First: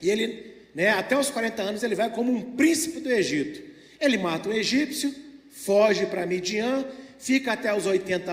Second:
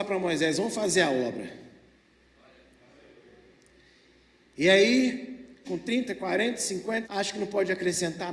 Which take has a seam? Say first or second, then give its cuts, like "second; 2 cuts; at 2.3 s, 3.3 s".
second; 2 cuts; at 5.6 s, 7.0 s